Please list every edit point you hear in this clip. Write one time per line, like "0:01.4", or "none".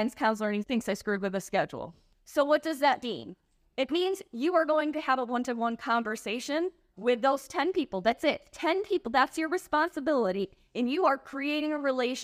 0:02.1